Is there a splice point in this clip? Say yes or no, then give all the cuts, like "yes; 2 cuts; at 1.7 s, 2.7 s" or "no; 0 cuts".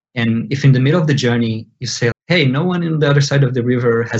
yes; 1 cut; at 2.1 s